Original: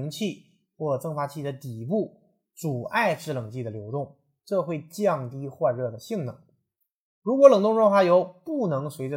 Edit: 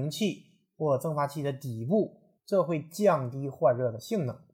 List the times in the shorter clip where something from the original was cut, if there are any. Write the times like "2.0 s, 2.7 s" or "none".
2.4 s

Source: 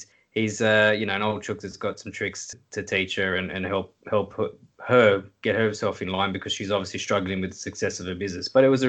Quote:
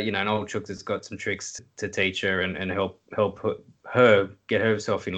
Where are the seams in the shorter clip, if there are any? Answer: none

